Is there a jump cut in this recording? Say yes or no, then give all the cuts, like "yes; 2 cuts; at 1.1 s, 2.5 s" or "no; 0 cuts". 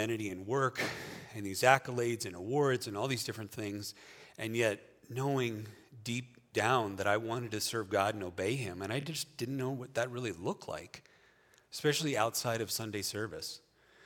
no; 0 cuts